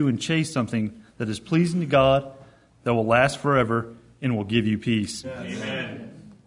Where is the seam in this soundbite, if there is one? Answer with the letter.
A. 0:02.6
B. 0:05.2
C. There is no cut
B